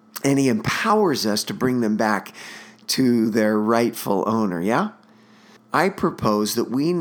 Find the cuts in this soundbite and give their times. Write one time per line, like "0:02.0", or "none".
0:05.6